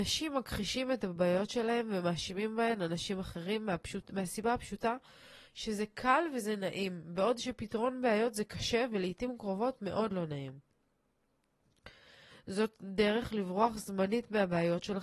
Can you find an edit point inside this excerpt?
yes; 1 cut; at 12.3 s

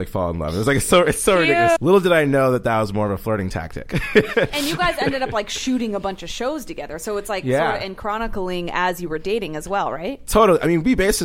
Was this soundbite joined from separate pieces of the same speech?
yes; 1 cut; at 1.8 s

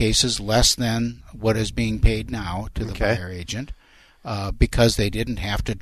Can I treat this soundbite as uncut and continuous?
yes; 0 cuts

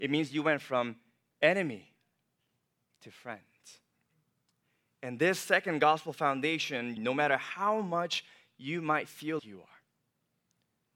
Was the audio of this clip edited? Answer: yes; 2 cuts; at 7.0 s, 9.4 s

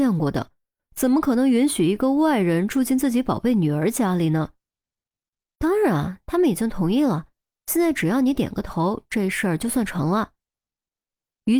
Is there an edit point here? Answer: no; 0 cuts

